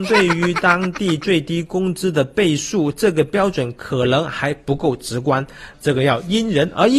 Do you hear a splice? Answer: yes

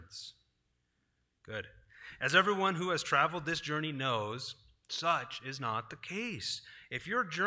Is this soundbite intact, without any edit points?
no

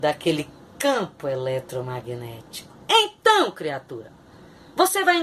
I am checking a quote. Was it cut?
no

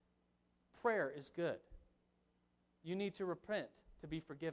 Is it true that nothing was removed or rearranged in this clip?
yes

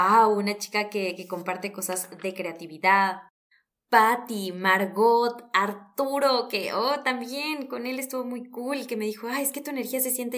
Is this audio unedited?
yes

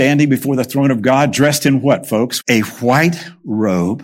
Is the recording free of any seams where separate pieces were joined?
no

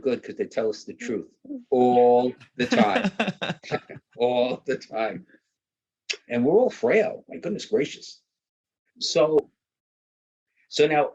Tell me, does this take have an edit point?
yes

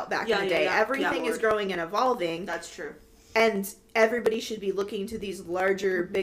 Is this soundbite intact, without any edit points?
yes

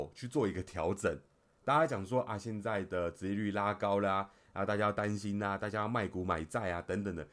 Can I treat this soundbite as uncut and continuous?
yes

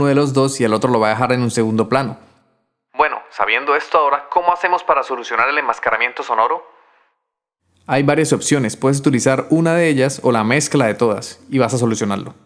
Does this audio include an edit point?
no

